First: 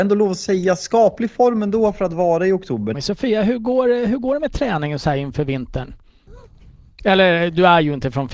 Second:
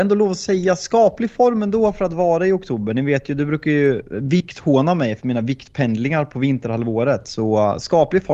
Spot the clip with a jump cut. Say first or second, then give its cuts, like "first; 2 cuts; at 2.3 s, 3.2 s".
first; 2 cuts; at 2.9 s, 6.3 s